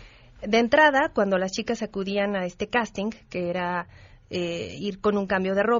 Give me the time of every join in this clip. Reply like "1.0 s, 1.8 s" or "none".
none